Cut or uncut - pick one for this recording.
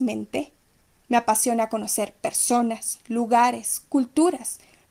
cut